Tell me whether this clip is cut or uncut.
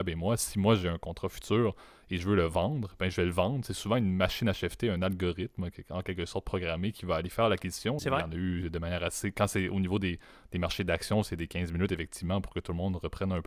cut